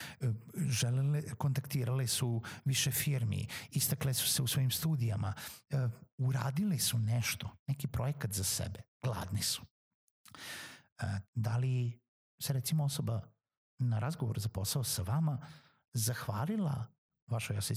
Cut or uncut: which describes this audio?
cut